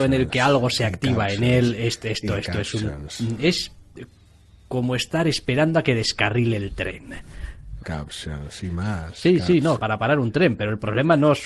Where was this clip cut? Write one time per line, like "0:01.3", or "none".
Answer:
0:07.8
0:09.8